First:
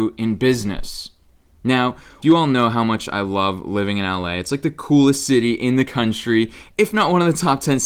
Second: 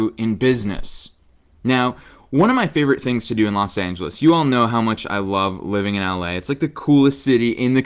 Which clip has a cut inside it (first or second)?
first